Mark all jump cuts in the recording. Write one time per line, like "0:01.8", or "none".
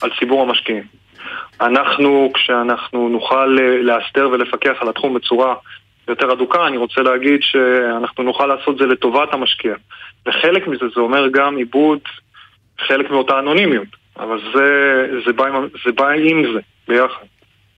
none